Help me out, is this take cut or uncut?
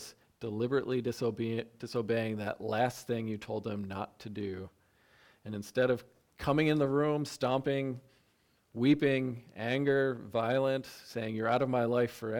uncut